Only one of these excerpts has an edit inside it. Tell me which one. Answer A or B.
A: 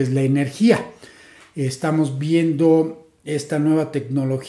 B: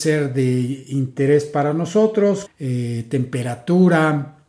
B